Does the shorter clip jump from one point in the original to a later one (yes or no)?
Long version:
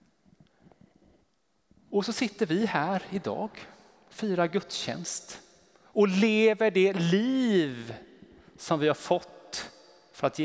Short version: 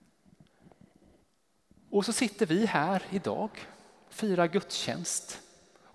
no